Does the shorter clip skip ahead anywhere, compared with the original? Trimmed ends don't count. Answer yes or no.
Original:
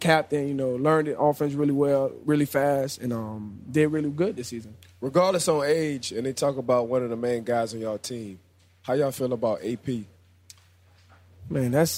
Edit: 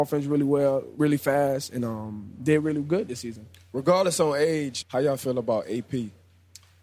yes